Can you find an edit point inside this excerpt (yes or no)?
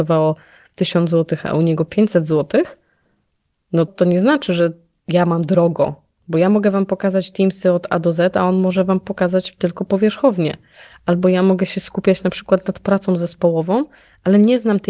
yes